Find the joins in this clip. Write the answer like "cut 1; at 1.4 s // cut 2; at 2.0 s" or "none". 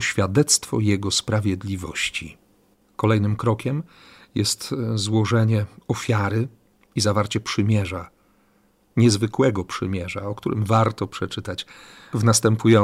none